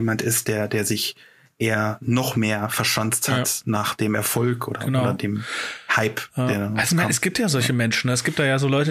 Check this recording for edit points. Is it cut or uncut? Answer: uncut